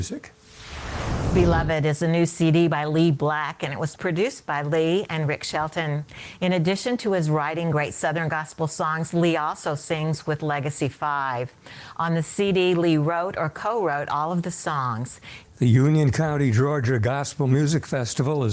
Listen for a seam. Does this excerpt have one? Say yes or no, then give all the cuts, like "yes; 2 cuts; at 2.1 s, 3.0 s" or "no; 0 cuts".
yes; 1 cut; at 15.4 s